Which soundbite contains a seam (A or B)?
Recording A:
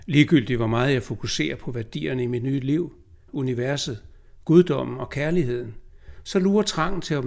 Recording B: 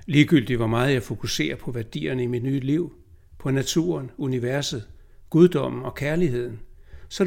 A